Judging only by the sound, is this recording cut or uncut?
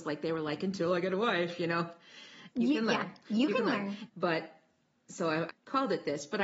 cut